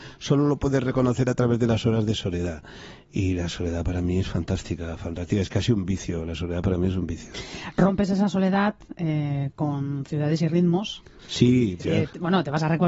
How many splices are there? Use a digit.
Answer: 2